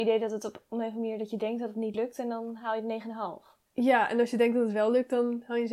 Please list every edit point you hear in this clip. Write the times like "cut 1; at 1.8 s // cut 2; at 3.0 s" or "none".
cut 1; at 3.7 s